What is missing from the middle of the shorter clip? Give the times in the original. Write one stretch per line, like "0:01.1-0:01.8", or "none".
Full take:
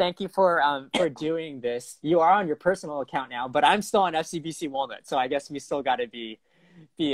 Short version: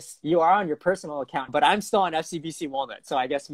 0:03.3-0:03.5